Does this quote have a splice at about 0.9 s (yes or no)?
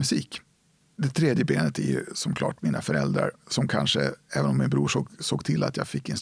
no